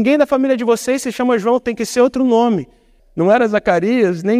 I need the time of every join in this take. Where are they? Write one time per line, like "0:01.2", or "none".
0:03.0